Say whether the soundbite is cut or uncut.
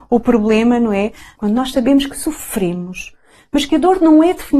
cut